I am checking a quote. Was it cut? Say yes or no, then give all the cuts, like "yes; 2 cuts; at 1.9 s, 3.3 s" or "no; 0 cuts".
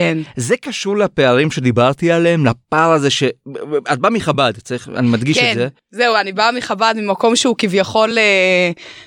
no; 0 cuts